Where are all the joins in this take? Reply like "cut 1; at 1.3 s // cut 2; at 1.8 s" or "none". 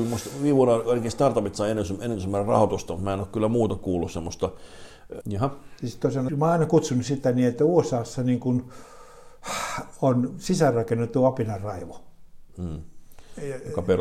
cut 1; at 5.2 s // cut 2; at 6.3 s